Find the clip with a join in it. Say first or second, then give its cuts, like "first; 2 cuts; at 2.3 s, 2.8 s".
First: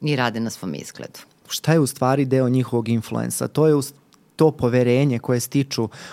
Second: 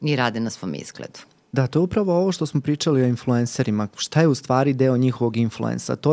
first; 1 cut; at 1.4 s